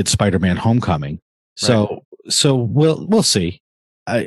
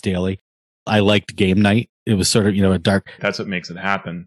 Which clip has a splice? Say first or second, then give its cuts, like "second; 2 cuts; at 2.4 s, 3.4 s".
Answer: second; 2 cuts; at 2.0 s, 3.2 s